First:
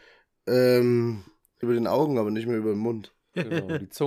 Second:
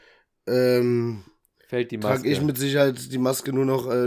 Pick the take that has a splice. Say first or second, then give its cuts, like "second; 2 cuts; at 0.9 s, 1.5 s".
first; 1 cut; at 1.6 s